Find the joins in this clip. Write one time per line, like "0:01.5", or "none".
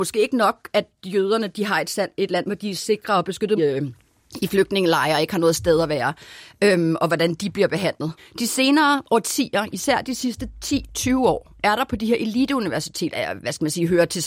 0:03.6
0:08.2
0:13.1